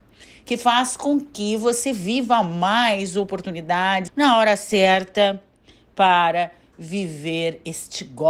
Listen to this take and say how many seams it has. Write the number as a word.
one